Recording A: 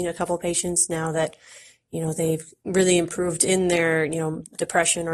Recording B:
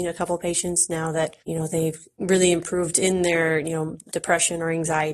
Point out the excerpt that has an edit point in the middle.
B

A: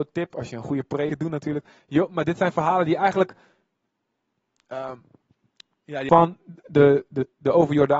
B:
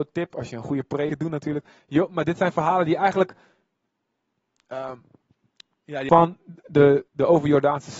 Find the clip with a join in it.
B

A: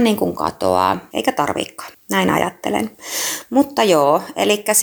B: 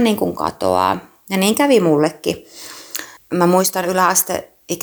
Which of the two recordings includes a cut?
A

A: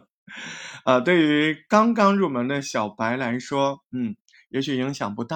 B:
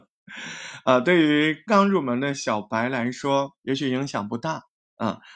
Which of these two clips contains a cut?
B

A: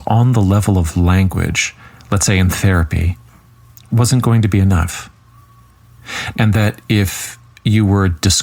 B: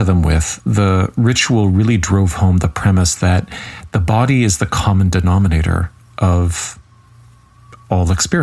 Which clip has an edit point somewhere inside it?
A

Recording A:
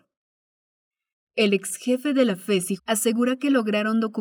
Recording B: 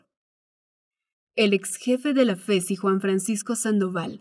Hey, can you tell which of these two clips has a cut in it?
A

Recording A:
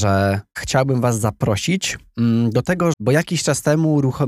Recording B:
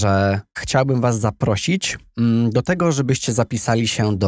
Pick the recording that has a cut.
A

